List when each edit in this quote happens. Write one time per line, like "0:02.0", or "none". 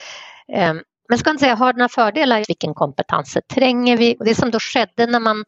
0:02.4
0:04.2